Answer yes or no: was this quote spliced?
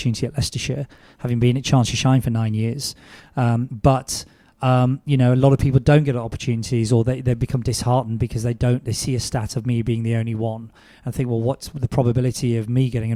no